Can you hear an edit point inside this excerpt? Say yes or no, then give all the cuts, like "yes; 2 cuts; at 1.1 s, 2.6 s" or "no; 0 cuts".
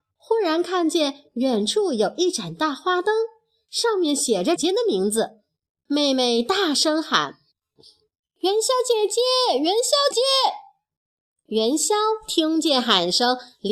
yes; 2 cuts; at 4.6 s, 10.1 s